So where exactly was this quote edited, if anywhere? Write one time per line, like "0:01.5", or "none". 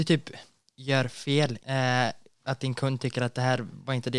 0:01.6

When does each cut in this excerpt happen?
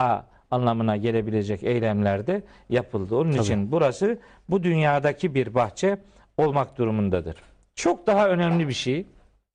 none

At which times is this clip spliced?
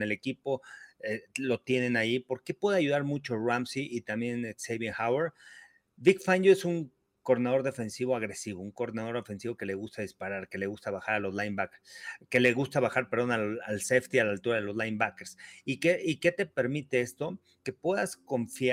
none

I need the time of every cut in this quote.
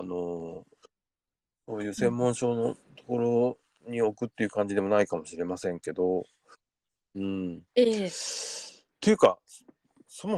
none

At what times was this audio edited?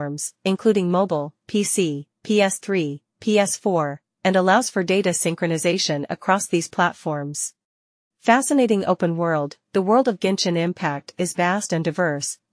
0:08.0

